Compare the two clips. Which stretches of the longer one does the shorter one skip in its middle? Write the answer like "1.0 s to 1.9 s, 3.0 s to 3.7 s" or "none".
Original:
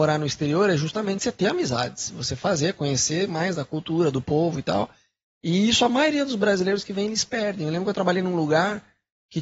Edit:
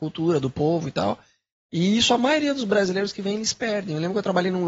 none